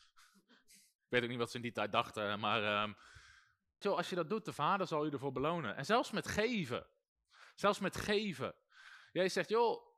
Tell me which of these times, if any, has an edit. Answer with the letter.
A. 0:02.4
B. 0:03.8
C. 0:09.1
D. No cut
B